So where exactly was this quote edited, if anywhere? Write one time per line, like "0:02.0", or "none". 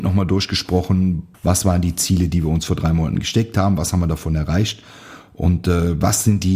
0:01.3